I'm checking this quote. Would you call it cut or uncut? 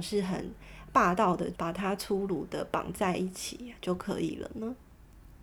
cut